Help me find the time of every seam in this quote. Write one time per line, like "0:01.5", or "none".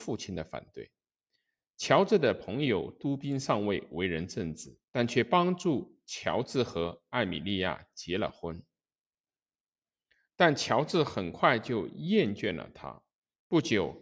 0:04.8

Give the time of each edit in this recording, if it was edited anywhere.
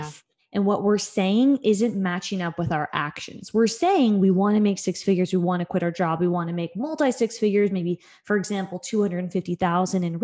none

